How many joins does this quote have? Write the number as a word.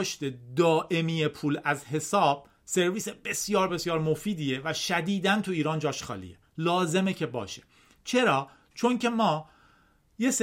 one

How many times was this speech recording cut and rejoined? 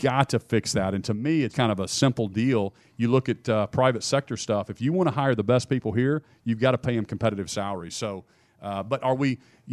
one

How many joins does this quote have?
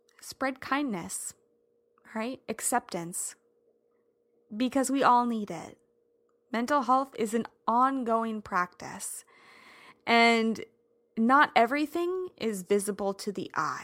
zero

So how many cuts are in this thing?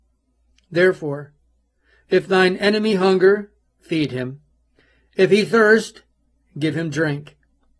zero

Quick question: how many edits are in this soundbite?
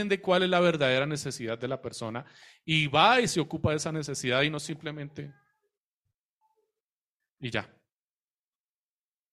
zero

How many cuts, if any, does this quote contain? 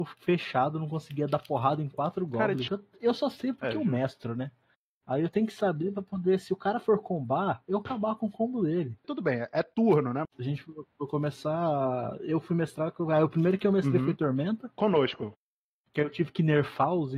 three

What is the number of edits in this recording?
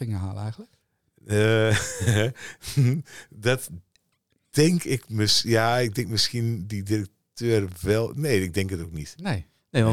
zero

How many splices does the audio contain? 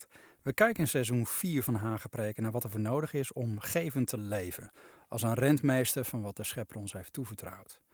zero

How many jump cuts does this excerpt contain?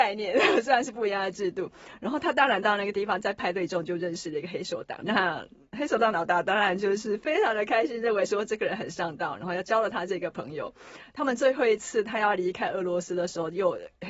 one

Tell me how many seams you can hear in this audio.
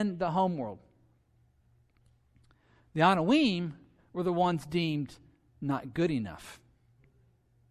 zero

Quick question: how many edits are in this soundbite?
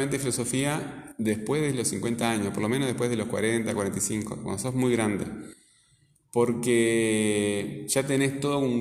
zero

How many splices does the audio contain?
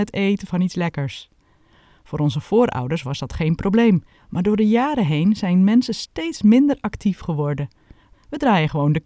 two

